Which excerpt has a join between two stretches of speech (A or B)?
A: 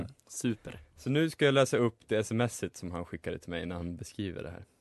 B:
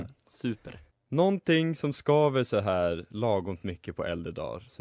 B